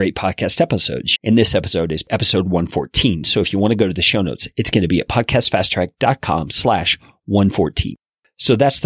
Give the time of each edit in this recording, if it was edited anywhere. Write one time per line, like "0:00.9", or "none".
0:01.2

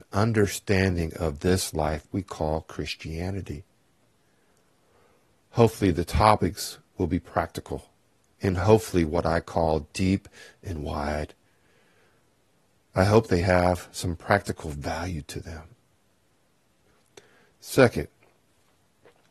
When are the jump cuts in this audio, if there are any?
none

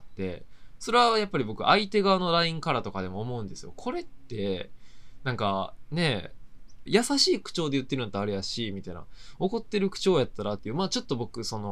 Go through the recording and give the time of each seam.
0:06.9
0:10.6

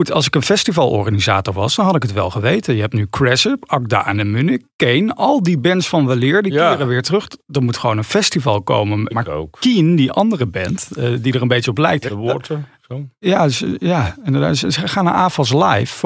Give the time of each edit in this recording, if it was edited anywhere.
0:09.1
0:12.1

